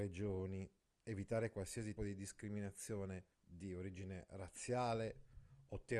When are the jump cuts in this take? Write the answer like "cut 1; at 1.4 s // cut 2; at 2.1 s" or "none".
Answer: cut 1; at 2.0 s // cut 2; at 3.3 s